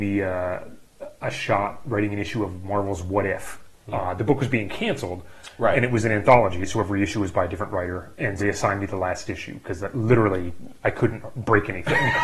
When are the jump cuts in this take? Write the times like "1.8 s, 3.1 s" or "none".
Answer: 8.4 s